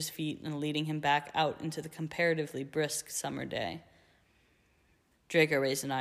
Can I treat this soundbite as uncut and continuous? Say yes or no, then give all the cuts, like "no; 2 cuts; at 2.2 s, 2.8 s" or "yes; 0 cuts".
no; 1 cut; at 5.1 s